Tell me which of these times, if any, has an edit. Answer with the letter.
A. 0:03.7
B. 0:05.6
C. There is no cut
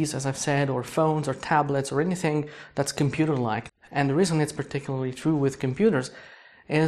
A